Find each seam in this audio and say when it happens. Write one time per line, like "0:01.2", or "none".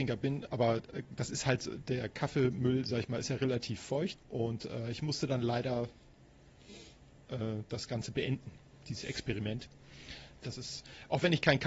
0:04.2
0:10.4